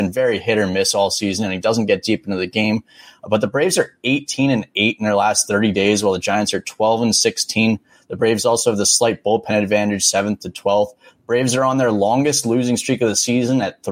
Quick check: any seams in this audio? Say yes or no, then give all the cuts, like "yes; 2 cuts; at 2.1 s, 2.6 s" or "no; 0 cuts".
no; 0 cuts